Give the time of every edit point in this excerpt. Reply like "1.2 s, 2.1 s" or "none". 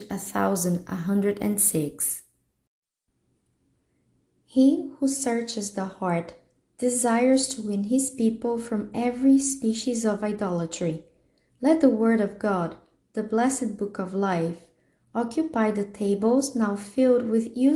none